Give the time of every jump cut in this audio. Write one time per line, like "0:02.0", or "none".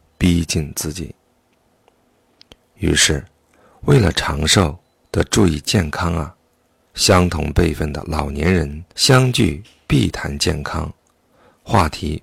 0:06.9
0:08.9

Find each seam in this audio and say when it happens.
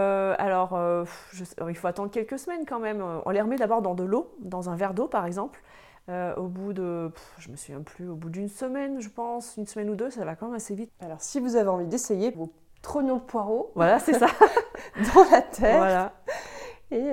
0:10.9
0:12.3

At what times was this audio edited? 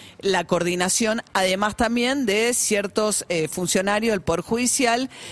none

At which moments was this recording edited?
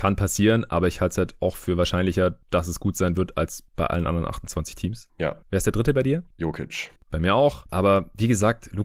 0:07.7

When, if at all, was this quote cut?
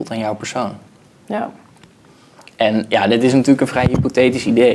none

